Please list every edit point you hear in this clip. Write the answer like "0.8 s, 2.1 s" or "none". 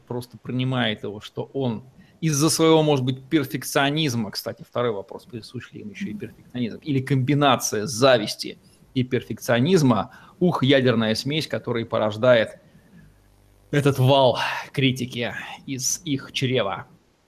none